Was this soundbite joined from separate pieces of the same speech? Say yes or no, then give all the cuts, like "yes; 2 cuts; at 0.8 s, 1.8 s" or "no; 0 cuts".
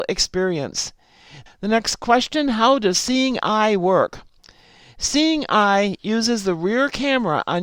yes; 1 cut; at 1.5 s